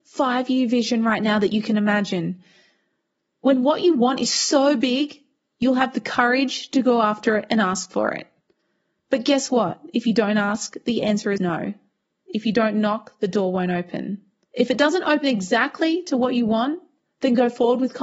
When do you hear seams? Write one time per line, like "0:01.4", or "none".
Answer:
0:11.4
0:14.5